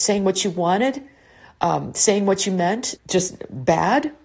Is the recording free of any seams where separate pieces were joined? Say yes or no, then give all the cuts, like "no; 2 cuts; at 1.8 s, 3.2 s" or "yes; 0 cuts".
no; 1 cut; at 3.0 s